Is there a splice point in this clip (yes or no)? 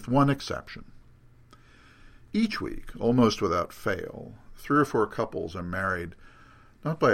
no